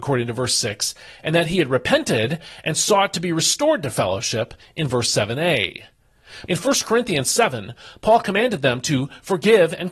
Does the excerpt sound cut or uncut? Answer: cut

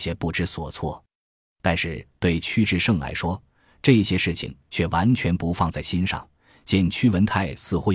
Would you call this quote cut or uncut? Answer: uncut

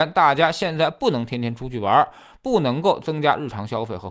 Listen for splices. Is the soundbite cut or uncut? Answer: uncut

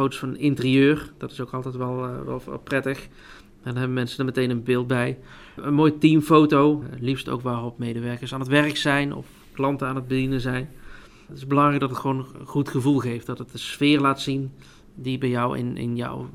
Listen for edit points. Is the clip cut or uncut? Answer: uncut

